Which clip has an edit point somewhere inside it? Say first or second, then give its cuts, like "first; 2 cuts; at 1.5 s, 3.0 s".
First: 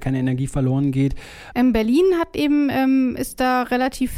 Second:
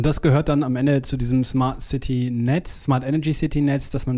first; 1 cut; at 1.5 s